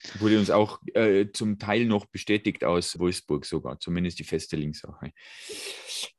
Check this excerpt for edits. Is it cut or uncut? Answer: cut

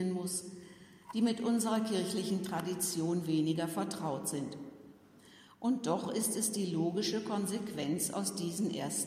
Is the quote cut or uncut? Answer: uncut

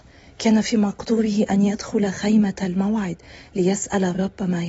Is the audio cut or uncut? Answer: uncut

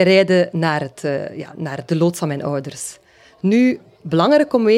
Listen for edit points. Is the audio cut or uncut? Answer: cut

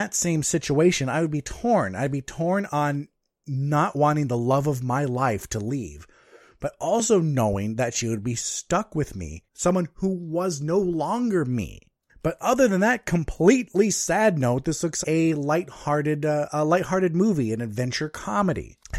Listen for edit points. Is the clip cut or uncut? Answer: cut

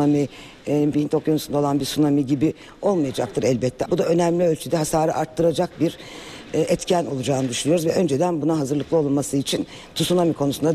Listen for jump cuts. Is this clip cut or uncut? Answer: cut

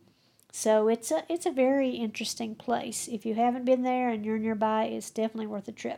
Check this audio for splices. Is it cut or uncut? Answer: uncut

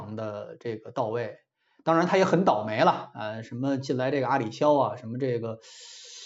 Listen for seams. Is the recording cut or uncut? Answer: uncut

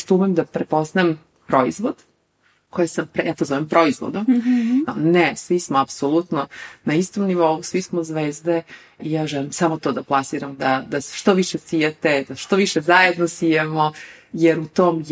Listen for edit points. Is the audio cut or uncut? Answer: cut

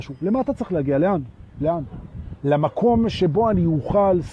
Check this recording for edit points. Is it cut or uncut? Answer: uncut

